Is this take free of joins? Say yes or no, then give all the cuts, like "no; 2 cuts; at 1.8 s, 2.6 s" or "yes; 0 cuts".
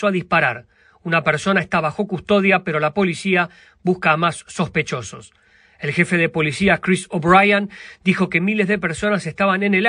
yes; 0 cuts